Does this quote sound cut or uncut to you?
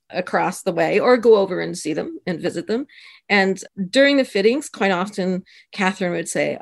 uncut